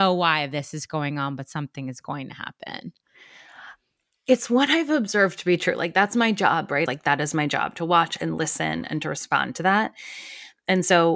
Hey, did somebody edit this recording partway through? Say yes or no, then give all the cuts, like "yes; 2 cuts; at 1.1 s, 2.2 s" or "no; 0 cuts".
yes; 1 cut; at 6.9 s